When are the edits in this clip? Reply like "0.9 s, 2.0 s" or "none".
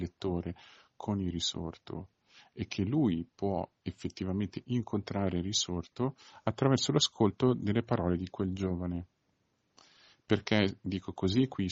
none